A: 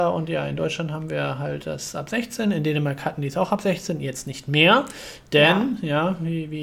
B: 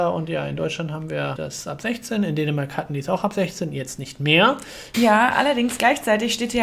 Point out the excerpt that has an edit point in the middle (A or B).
B